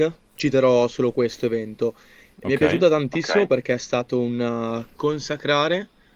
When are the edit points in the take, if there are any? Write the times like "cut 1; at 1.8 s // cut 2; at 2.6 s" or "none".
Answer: none